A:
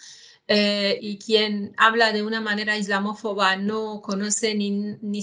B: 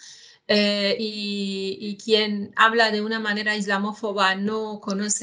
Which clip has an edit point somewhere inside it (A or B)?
A